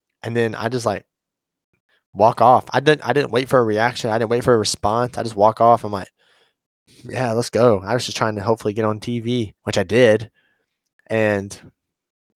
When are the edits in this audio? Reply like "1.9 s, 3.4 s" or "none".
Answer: 6.9 s, 9.6 s